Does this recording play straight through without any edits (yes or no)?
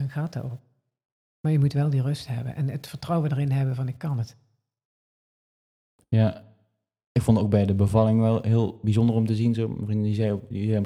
yes